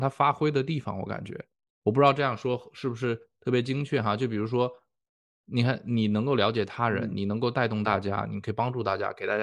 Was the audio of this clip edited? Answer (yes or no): no